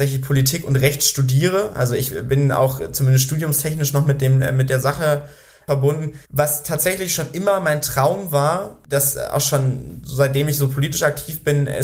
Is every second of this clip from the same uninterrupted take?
no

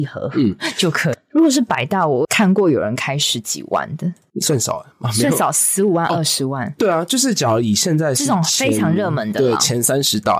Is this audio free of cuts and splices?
no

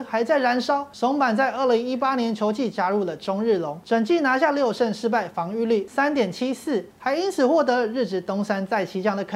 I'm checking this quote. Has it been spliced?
no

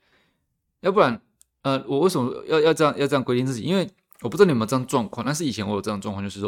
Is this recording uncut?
yes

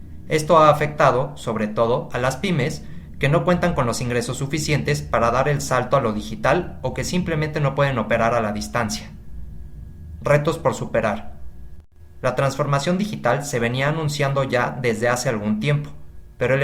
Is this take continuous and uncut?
yes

